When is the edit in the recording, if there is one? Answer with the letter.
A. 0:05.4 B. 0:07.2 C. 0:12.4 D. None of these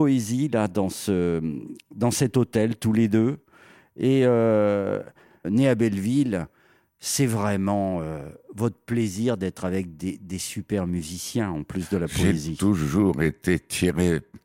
A